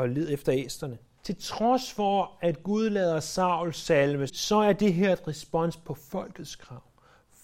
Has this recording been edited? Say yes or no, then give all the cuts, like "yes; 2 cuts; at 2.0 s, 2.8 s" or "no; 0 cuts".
yes; 2 cuts; at 1.2 s, 4.3 s